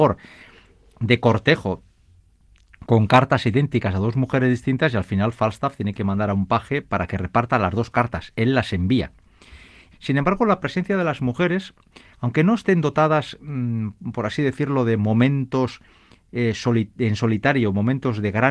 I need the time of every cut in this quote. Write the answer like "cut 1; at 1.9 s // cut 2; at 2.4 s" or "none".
cut 1; at 9.9 s

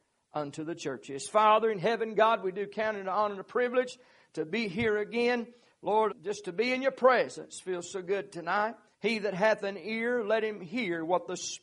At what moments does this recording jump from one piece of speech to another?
cut 1; at 6.1 s // cut 2; at 8.9 s

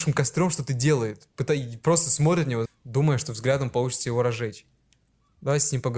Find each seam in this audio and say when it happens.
cut 1; at 2.6 s

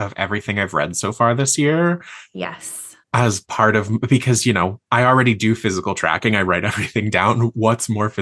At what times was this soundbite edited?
cut 1; at 3.0 s

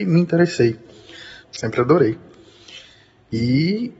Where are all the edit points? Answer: cut 1; at 1.4 s

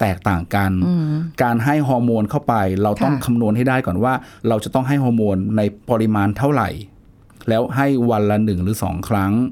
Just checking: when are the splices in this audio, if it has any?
cut 1; at 4.4 s // cut 2; at 5.8 s

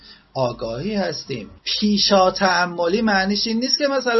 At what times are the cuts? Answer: cut 1; at 1.6 s

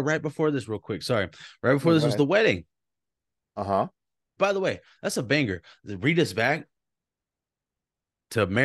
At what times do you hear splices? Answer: cut 1; at 4.4 s

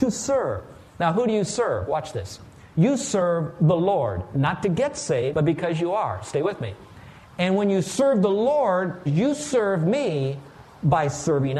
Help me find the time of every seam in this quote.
cut 1; at 5.3 s // cut 2; at 9.1 s

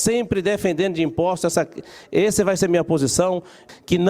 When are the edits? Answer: none

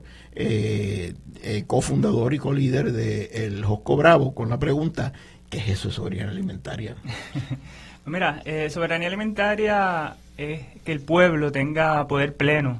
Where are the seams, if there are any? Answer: none

